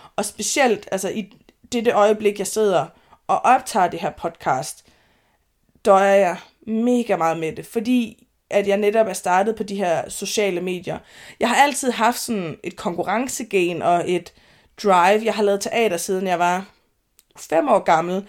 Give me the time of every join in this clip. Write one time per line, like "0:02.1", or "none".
0:17.4